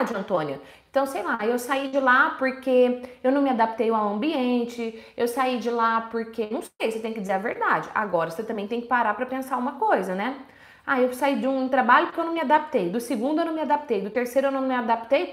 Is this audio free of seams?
yes; 0 cuts

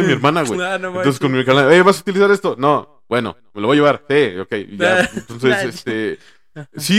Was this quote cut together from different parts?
no; 0 cuts

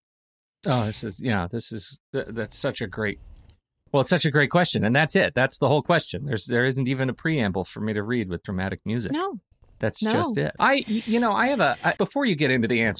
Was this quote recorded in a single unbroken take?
no; 2 cuts; at 10.6 s, 12.0 s

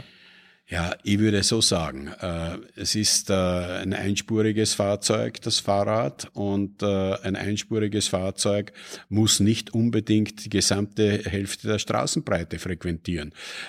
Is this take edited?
no; 0 cuts

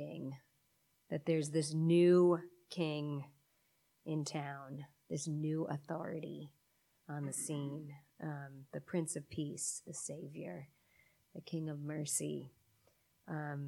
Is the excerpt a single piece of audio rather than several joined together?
yes; 0 cuts

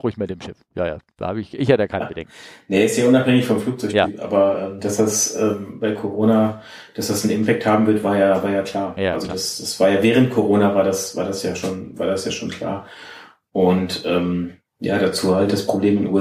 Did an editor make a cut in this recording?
no; 0 cuts

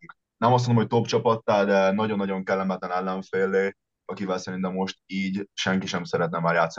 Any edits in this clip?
no; 0 cuts

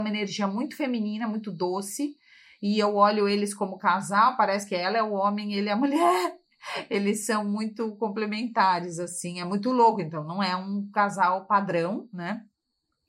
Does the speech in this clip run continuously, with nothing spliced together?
yes; 0 cuts

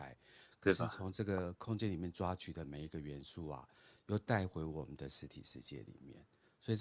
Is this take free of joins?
yes; 0 cuts

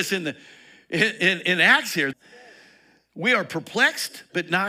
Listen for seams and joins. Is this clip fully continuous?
no; 1 cut; at 2.1 s

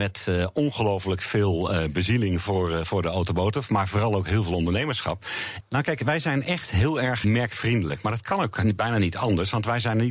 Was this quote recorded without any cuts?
no; 2 cuts; at 5.6 s, 7.2 s

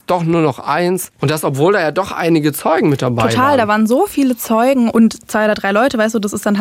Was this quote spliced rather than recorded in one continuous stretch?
yes; 2 cuts; at 1.2 s, 4.9 s

